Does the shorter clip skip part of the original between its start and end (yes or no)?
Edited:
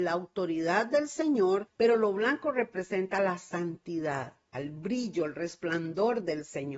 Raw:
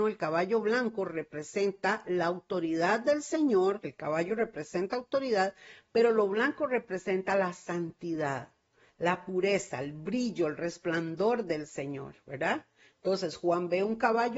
yes